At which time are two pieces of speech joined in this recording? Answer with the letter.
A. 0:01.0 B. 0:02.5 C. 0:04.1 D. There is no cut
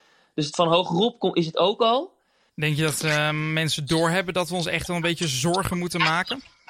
B